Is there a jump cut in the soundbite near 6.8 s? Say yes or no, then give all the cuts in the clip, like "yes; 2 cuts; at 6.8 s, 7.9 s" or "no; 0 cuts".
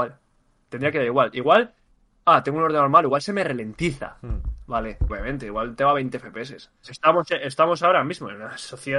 yes; 2 cuts; at 5.1 s, 6.8 s